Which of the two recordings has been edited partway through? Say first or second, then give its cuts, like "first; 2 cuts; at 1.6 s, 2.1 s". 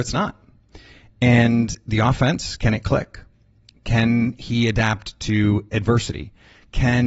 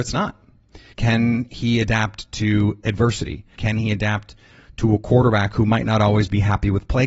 second; 2 cuts; at 0.9 s, 3.6 s